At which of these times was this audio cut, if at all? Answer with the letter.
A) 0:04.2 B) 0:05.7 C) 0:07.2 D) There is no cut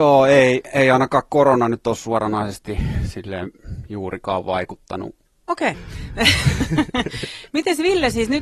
B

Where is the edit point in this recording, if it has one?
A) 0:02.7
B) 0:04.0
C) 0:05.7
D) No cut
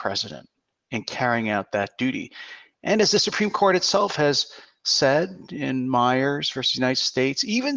D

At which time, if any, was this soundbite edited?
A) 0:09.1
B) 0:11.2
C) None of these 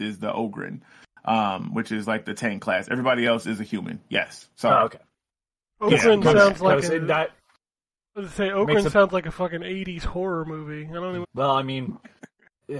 B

